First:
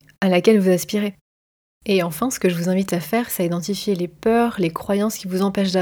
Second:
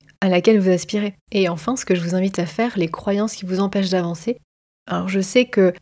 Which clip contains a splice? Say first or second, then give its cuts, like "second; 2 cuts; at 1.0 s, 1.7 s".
second; 3 cuts; at 1.2 s, 2.7 s, 4.8 s